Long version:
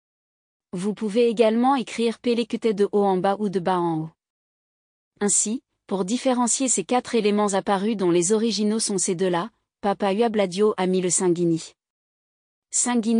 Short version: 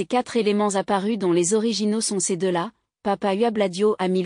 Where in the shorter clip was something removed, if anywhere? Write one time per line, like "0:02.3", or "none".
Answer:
none